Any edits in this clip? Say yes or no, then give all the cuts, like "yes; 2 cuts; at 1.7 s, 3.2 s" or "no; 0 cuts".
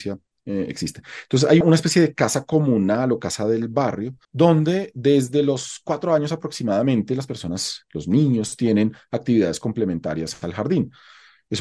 yes; 2 cuts; at 1.6 s, 4.2 s